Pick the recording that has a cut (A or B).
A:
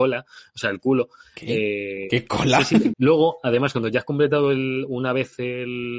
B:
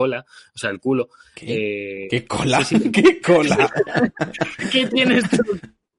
A